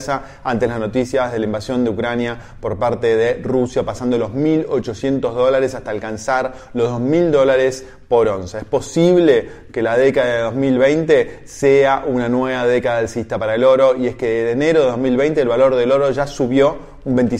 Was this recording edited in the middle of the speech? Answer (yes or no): no